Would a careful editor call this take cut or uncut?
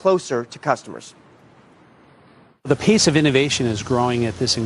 uncut